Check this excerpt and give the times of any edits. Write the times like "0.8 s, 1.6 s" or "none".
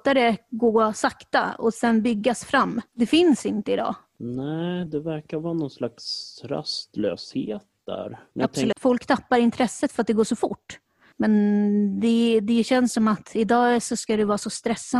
4.9 s, 8.7 s, 11.1 s